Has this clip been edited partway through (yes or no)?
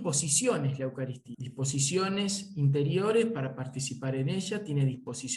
no